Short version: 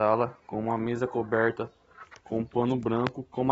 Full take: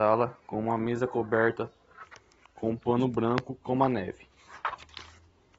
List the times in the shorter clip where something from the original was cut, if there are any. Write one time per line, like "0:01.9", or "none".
0:02.2

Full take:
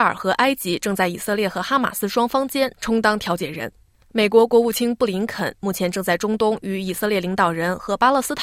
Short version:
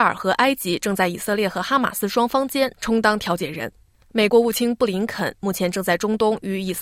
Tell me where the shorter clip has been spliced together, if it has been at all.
0:04.3

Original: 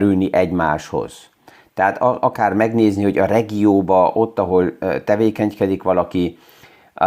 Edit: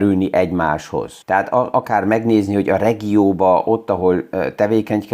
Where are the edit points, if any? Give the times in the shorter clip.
0:01.2

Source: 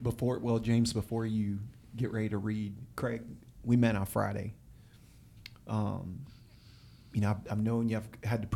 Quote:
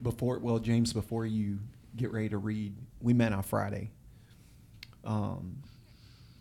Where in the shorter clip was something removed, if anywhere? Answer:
0:02.9

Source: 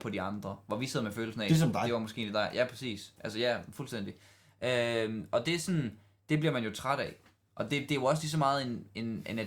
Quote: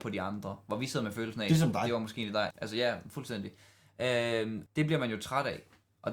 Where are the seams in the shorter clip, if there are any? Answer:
0:02.5
0:04.7

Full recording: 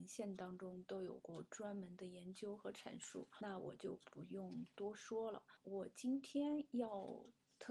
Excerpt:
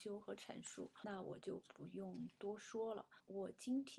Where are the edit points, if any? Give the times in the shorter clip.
none

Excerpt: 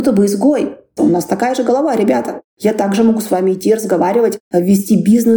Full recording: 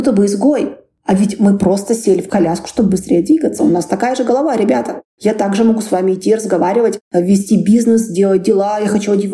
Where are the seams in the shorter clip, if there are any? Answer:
0:01.0

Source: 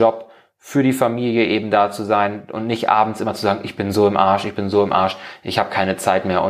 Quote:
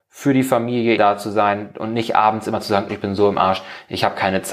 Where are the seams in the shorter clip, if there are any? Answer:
0:01.0
0:02.9

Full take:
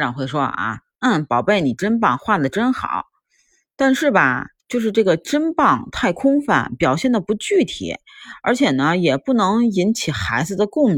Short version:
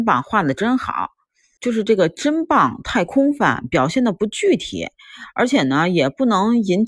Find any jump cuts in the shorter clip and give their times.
0:01.6

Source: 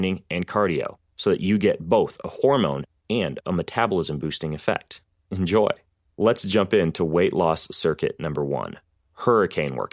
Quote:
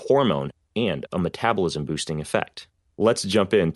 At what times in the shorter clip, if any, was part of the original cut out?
0:02.8

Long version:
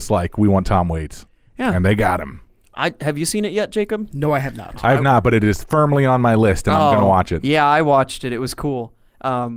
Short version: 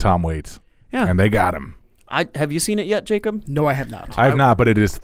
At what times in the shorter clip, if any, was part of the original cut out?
none

